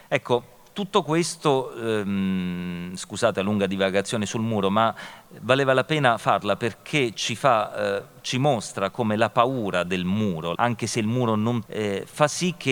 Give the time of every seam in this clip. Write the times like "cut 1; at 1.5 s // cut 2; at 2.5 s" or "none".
cut 1; at 10.5 s // cut 2; at 11.7 s